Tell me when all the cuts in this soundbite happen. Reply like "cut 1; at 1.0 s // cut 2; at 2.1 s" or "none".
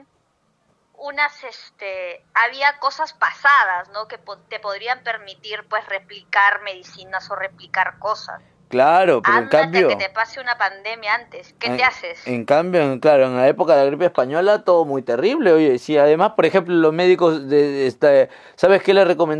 none